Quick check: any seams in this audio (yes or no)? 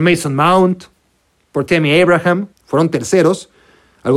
yes